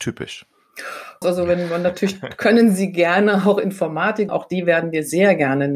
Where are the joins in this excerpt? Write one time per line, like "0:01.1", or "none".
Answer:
0:01.2
0:04.3